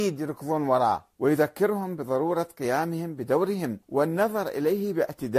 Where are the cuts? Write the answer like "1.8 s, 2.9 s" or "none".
1.1 s, 3.8 s

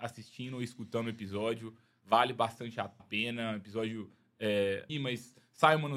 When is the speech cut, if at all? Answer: 3.0 s, 4.9 s

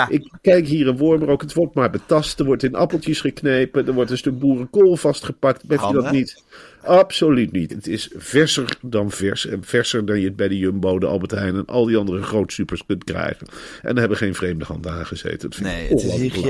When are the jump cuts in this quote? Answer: 5.8 s, 7.7 s

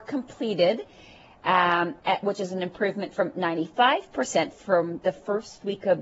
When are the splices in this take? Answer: 2.0 s

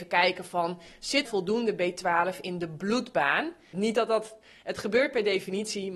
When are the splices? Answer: 1.3 s, 3.7 s

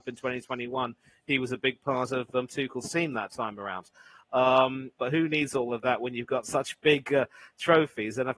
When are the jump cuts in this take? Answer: 5.0 s

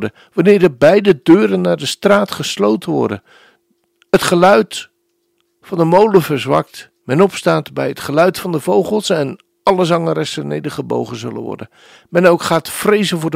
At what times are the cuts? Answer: 7.0 s

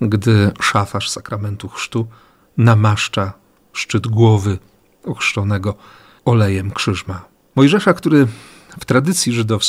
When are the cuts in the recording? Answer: 7.5 s

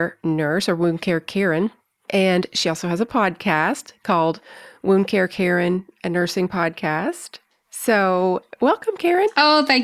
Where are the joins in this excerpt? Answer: none

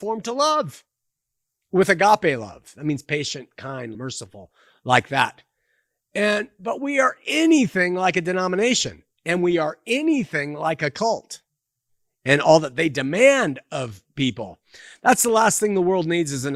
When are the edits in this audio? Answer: 3.9 s

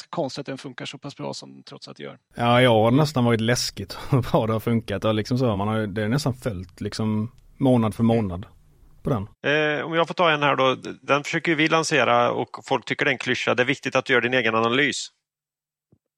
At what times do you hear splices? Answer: 5.5 s, 9.3 s

